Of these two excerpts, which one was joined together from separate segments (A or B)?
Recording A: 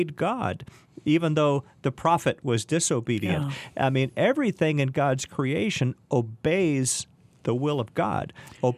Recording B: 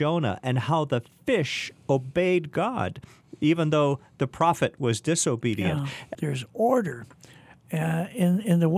B